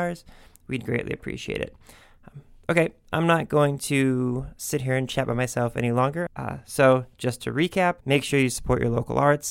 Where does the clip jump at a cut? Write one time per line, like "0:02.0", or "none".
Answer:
0:06.3
0:08.0

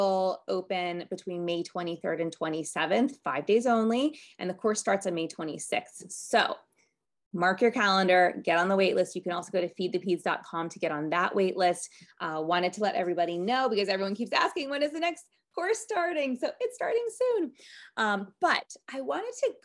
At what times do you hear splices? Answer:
none

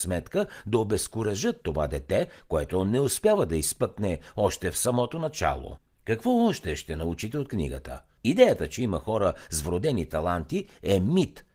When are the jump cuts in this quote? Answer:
0:05.9
0:08.2

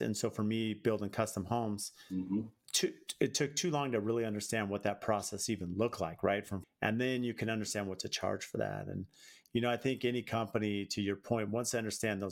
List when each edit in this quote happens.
0:06.6

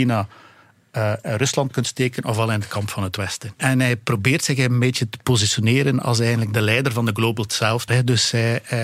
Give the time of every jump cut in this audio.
0:03.5
0:07.9

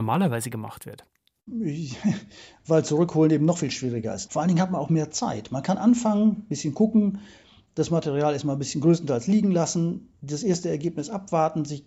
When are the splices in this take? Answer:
0:04.3

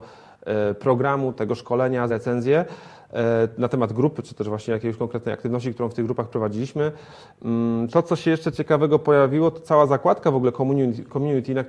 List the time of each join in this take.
0:02.1
0:07.9

